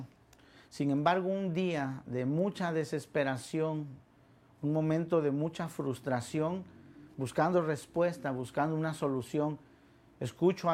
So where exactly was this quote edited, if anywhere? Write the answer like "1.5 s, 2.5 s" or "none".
7.1 s